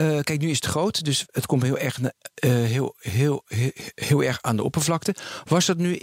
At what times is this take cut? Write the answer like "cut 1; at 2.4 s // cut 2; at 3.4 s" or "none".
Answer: none